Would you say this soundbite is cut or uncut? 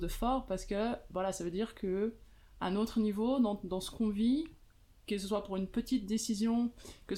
uncut